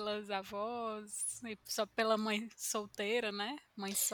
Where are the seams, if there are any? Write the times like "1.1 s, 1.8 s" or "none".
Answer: none